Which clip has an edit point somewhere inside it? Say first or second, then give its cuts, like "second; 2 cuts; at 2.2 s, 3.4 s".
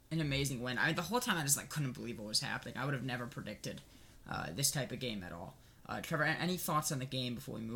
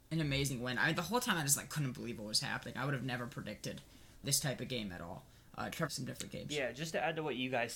second; 2 cuts; at 4.2 s, 5.9 s